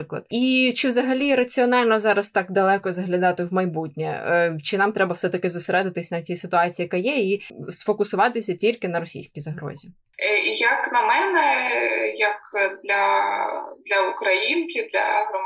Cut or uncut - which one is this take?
uncut